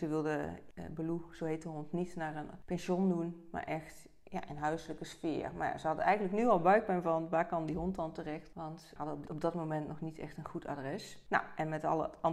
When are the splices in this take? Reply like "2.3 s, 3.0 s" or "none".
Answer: none